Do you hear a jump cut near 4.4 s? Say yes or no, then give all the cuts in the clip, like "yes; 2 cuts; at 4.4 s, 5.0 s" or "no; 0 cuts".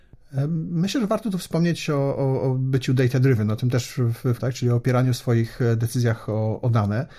yes; 1 cut; at 4.4 s